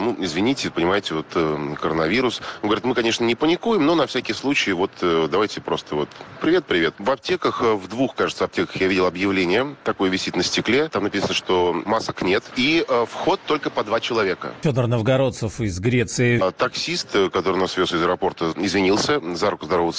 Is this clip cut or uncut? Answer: cut